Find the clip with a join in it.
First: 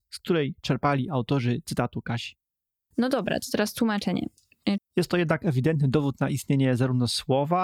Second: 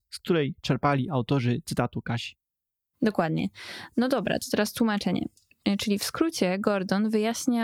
first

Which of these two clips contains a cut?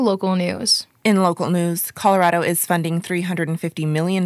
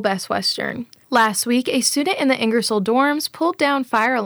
second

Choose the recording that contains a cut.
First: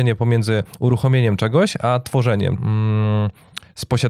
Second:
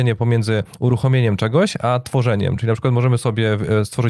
first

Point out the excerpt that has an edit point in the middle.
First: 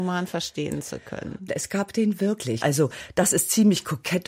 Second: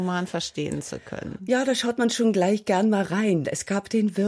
first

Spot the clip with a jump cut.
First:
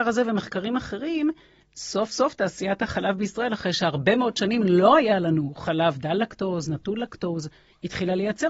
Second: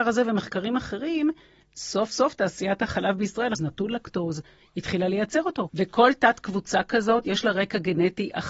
second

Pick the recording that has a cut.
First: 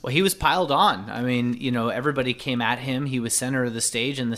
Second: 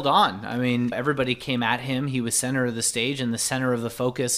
second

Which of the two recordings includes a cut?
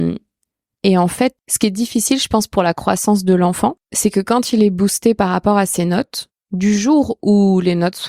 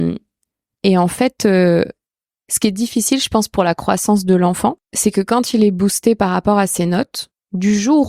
first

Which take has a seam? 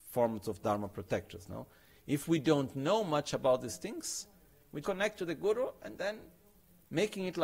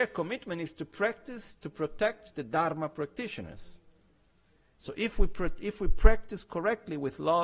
first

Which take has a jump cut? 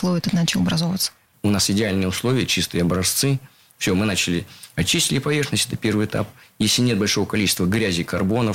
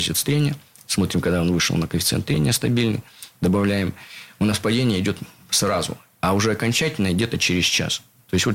first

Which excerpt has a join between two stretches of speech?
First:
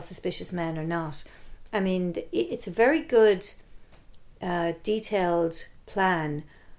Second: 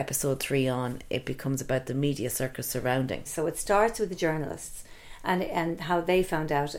second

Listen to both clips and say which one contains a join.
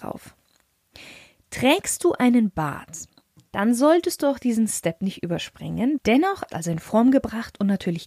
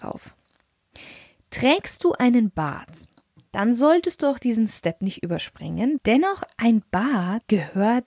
first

